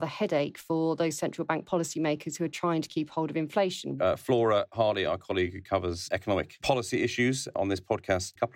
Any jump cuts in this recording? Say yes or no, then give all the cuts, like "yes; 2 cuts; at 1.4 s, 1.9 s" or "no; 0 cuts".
yes; 1 cut; at 4.0 s